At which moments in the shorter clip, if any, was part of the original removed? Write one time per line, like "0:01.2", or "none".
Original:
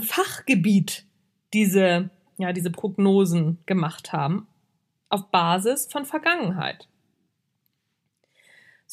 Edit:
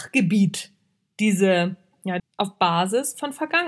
0:02.2